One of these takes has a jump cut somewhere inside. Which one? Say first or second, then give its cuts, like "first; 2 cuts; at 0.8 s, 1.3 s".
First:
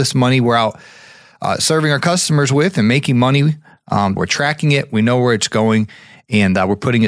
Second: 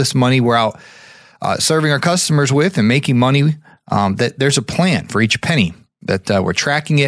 first; 1 cut; at 4.2 s